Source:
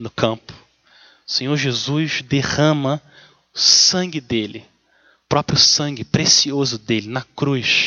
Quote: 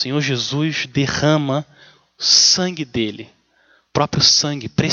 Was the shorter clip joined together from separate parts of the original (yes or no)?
no